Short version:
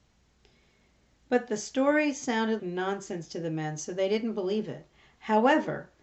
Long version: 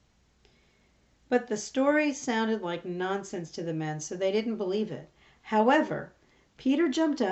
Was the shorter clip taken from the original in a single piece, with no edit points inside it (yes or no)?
no